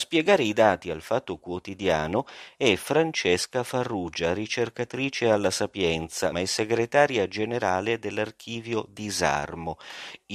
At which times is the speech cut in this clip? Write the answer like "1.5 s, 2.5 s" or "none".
6.3 s

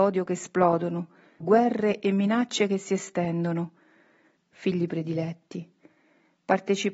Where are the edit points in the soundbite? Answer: 1.4 s, 4.4 s

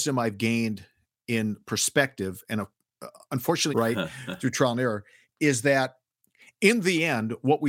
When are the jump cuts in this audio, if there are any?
3.7 s

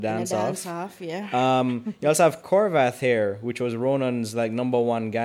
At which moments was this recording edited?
none

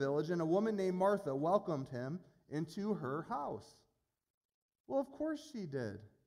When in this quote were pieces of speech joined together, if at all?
none

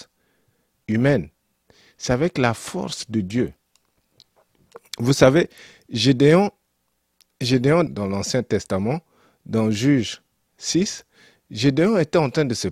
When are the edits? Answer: 7.9 s

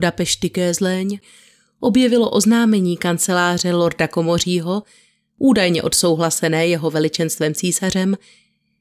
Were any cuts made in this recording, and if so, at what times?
none

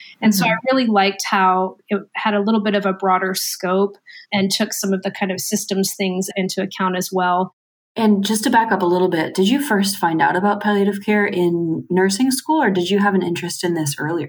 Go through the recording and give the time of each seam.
none

